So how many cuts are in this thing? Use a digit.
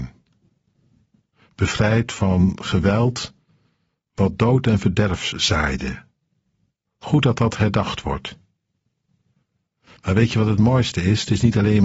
0